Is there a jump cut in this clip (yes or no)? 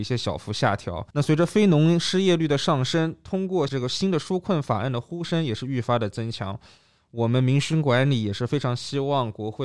yes